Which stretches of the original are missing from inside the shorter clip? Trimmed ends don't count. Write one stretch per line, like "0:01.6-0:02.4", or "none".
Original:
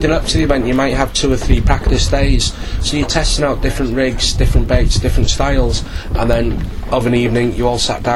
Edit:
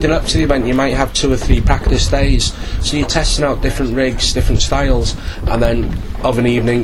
0:04.3-0:05.0